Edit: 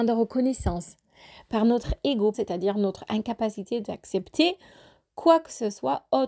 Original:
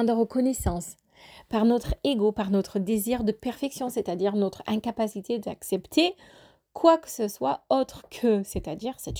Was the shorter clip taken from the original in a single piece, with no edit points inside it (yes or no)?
no